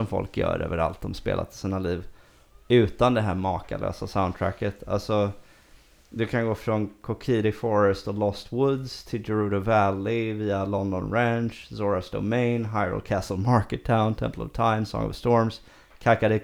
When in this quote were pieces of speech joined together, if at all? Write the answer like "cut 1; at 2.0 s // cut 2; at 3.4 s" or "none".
none